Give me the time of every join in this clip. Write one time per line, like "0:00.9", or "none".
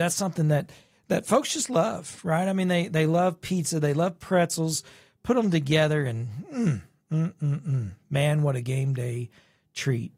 none